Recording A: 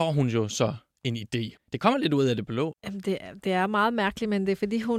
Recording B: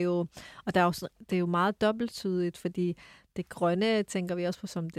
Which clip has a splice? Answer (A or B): A